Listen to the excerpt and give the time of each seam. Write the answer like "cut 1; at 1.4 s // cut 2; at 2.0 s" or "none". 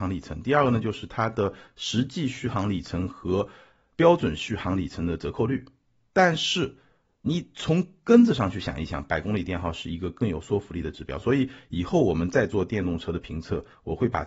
none